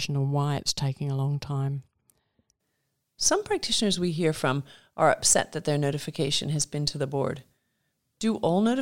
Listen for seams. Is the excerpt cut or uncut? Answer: uncut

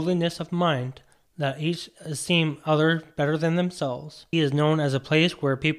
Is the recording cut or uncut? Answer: cut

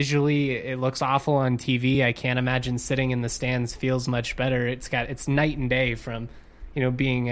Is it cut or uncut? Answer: uncut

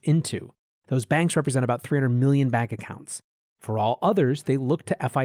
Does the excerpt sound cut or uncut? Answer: cut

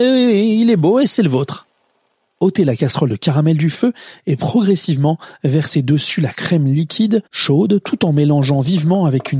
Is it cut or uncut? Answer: uncut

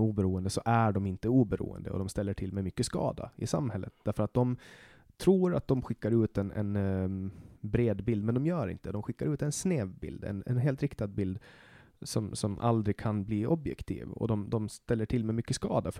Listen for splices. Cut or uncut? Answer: cut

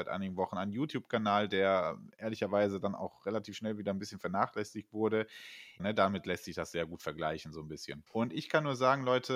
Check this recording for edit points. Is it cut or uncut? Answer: cut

